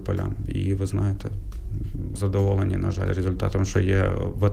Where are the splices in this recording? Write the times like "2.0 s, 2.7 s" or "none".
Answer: 2.2 s